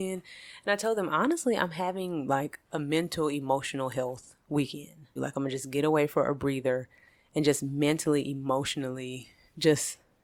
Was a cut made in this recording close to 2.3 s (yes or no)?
no